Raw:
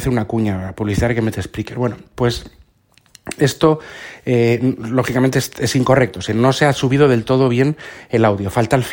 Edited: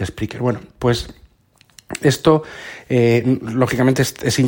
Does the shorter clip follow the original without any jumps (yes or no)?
yes